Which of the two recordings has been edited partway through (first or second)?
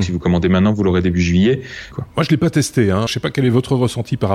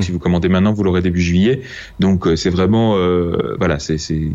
first